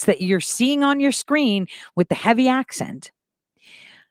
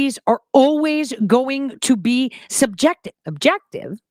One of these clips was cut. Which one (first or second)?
second